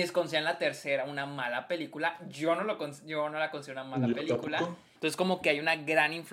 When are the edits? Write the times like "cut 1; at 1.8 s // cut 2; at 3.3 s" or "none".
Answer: cut 1; at 5.0 s